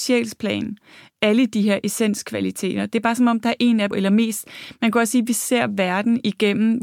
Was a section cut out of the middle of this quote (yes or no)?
yes